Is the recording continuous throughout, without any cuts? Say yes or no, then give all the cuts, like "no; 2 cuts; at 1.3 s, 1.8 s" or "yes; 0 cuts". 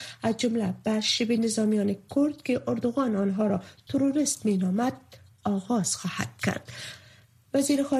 yes; 0 cuts